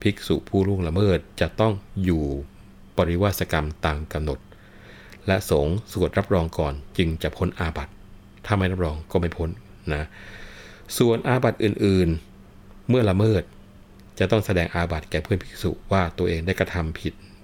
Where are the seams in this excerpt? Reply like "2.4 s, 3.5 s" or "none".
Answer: 12.3 s